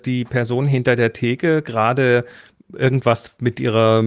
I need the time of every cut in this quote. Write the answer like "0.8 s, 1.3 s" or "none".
none